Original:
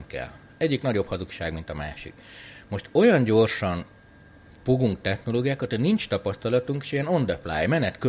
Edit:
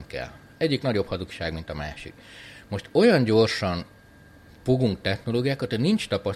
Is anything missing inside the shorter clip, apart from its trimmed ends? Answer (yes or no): no